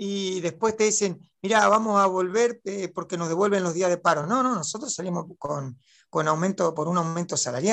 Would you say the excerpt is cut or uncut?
uncut